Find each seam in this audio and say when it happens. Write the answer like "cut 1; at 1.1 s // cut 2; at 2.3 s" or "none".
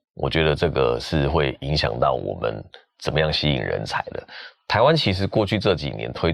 none